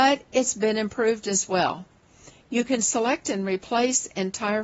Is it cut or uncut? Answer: uncut